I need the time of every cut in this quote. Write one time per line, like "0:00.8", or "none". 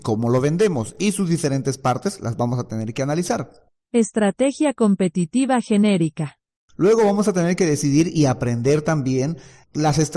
none